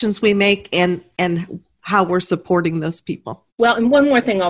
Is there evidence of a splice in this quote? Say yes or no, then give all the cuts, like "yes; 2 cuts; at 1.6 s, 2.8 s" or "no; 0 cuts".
yes; 1 cut; at 3.5 s